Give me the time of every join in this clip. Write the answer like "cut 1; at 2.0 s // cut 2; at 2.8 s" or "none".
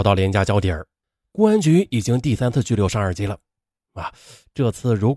cut 1; at 1.3 s